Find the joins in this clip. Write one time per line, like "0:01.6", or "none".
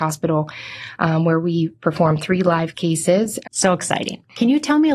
0:03.4

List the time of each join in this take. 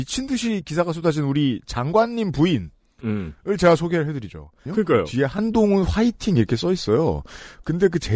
0:04.7

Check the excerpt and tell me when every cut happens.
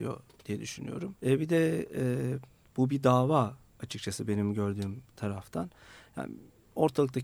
0:01.2

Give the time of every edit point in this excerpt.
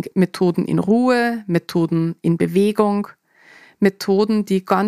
none

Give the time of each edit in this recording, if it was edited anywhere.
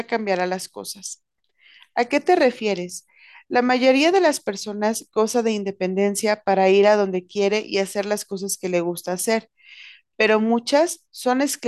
none

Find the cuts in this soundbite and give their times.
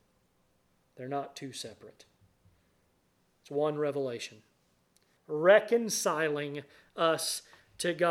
0:05.2

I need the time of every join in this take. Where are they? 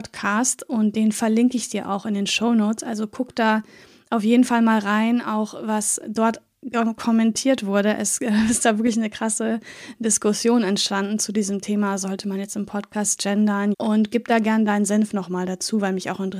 0:13.7

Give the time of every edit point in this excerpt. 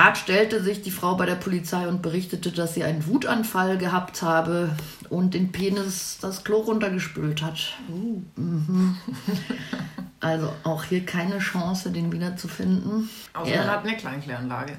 none

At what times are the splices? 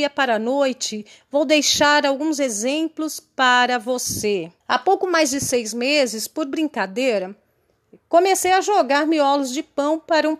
0:04.6

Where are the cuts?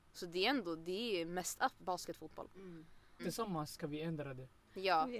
0:01.8
0:03.2

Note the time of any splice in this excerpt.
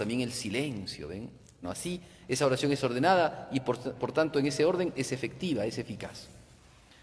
0:01.6

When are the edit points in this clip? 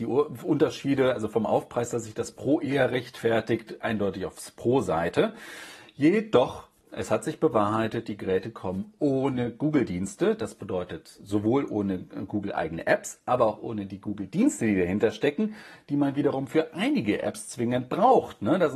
none

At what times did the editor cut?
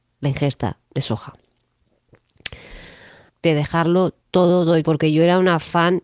0:03.3
0:04.8

